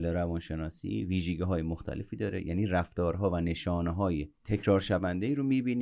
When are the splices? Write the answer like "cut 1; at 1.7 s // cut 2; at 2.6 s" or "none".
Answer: cut 1; at 4.4 s

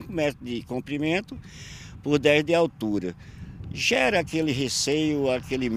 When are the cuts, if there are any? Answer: none

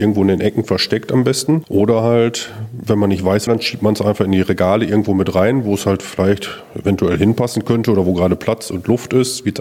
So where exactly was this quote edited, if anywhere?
cut 1; at 3.5 s

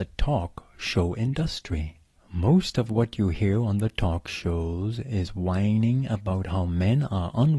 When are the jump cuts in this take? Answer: cut 1; at 2.2 s

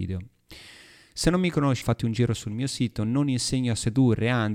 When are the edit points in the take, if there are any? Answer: cut 1; at 1.8 s

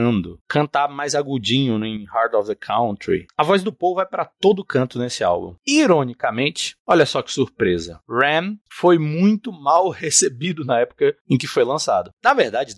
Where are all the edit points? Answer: cut 1; at 3.3 s

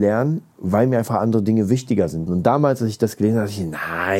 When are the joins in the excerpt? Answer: cut 1; at 2.3 s

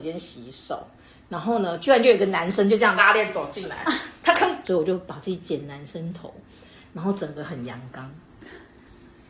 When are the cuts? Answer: cut 1; at 3.0 s // cut 2; at 4.6 s

